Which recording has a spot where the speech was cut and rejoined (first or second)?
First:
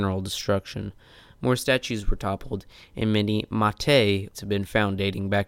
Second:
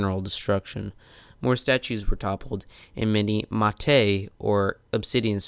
first